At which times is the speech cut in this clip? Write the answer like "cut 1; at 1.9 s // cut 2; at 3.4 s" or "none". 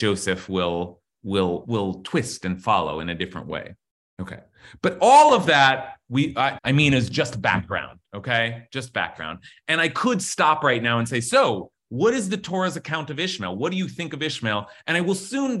cut 1; at 1.6 s // cut 2; at 6.6 s